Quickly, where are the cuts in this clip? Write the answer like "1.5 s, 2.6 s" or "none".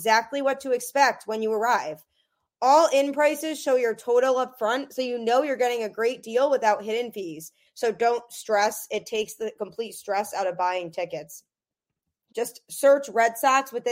7.7 s, 12.3 s